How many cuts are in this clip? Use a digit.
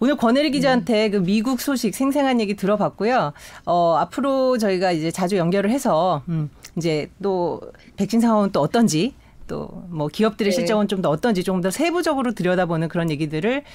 0